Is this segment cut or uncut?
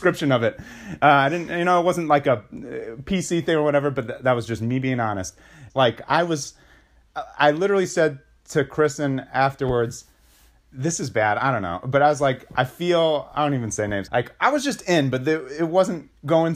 cut